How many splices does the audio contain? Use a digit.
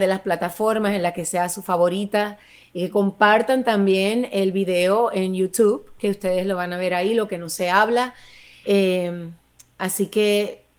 1